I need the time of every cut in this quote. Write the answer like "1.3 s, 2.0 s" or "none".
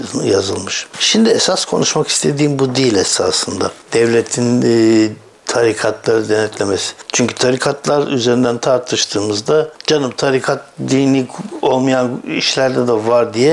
7.0 s